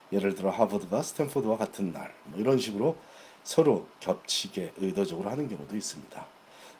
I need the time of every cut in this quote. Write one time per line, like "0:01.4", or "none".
0:02.2